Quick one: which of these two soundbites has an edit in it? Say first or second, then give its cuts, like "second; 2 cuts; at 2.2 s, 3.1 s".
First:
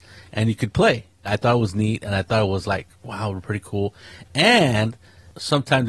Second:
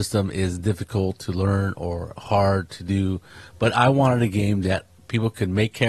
first; 1 cut; at 1.3 s